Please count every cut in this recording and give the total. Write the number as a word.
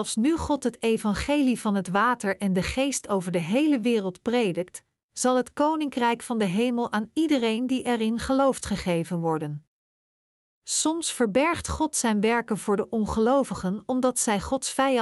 one